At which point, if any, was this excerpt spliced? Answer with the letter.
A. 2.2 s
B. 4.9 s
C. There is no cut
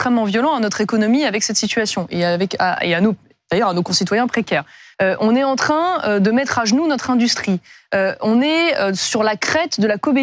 C